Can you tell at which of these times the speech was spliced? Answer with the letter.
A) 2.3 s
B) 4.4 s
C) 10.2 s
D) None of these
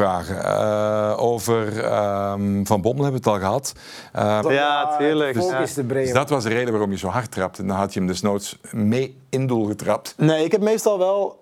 B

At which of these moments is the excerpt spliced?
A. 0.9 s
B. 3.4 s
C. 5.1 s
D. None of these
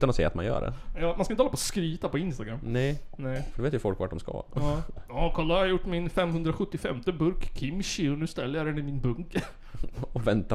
D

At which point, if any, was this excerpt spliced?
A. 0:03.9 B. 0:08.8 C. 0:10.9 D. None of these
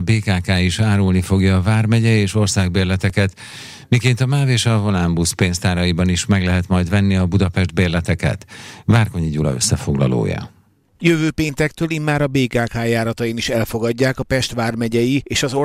D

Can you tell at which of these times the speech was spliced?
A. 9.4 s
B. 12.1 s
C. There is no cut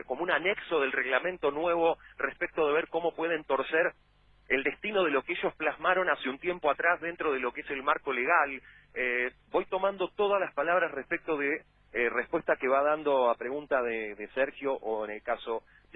A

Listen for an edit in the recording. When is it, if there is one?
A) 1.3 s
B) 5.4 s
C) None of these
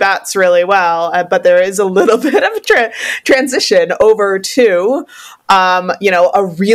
C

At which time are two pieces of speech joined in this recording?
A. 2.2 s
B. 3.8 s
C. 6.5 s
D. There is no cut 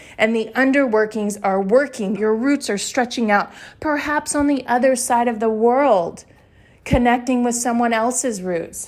A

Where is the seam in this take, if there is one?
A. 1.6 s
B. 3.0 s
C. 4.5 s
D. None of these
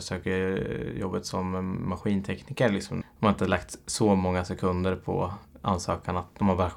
B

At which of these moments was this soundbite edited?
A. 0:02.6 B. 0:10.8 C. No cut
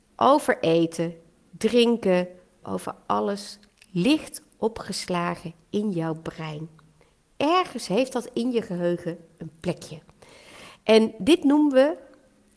A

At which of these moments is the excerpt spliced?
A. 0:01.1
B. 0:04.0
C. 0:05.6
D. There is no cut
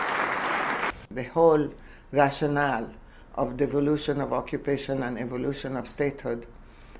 A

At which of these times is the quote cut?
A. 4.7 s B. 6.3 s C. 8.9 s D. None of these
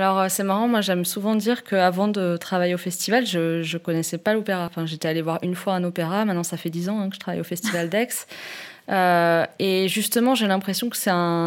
D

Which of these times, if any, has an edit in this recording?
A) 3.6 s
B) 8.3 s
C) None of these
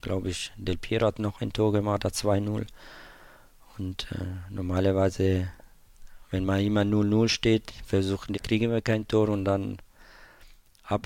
B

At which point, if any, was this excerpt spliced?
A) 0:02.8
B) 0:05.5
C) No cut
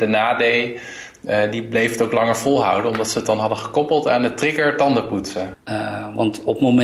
B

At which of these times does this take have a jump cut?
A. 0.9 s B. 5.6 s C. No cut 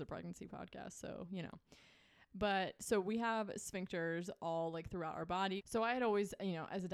B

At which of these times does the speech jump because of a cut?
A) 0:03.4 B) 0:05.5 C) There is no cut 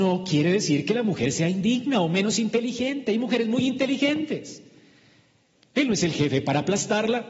B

